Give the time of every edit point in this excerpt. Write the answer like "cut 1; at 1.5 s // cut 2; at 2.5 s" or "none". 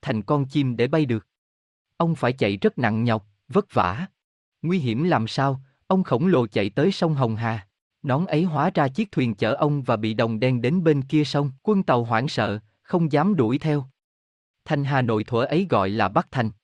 cut 1; at 4.4 s // cut 2; at 7.9 s // cut 3; at 11.6 s